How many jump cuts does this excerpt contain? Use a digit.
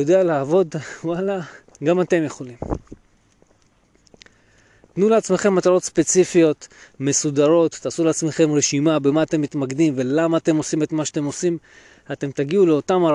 1